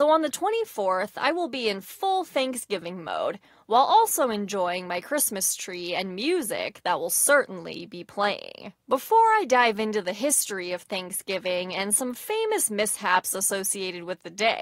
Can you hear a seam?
yes; 1 cut; at 8.8 s

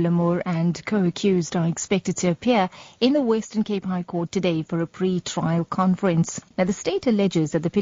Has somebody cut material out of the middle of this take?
yes; 1 cut; at 6.5 s

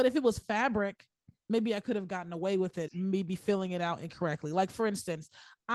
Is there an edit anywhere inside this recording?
yes; 1 cut; at 2.9 s

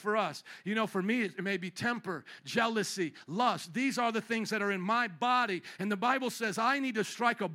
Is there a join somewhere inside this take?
no; 0 cuts

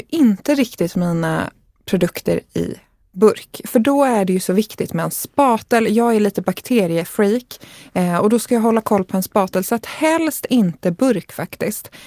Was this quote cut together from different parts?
no; 0 cuts

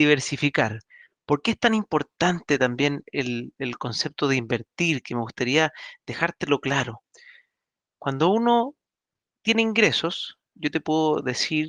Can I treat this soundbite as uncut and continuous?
yes; 0 cuts

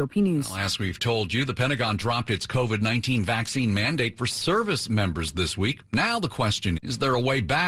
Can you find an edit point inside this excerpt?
yes; 1 cut; at 6.8 s

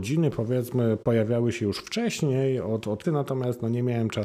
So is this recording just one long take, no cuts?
no; 1 cut; at 3.0 s

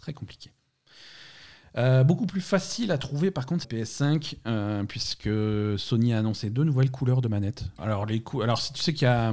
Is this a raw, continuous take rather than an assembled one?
no; 2 cuts; at 3.6 s, 7.8 s

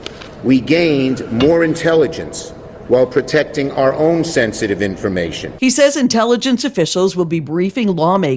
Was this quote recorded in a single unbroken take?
yes; 0 cuts

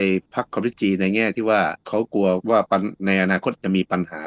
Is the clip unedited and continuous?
yes; 0 cuts

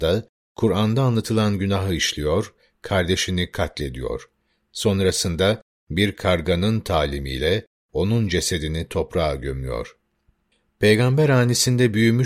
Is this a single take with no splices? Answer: yes; 0 cuts

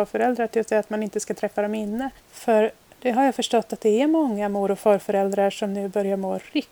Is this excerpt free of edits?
no; 1 cut; at 2.2 s

